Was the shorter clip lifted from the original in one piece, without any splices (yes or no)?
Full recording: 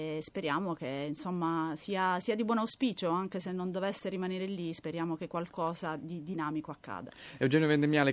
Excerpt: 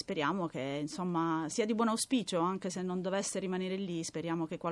no